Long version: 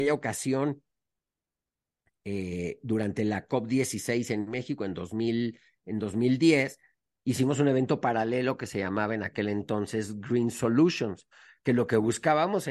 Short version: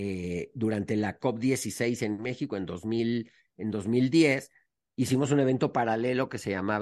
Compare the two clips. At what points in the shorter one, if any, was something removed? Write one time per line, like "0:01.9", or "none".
none